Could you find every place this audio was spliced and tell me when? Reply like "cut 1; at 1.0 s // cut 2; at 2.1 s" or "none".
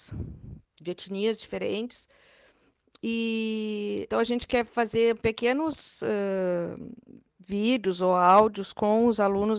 cut 1; at 4.1 s